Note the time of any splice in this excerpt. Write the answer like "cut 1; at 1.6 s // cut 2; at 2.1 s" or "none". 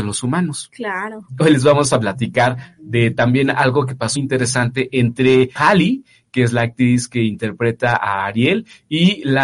cut 1; at 4.2 s // cut 2; at 5.6 s